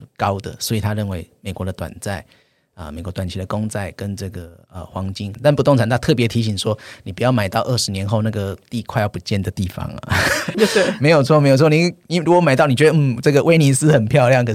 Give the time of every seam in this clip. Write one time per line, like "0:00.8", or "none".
0:05.3
0:10.5